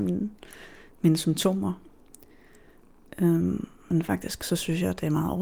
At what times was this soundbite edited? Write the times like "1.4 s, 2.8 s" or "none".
none